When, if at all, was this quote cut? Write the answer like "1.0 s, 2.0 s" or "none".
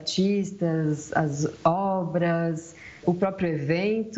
3.0 s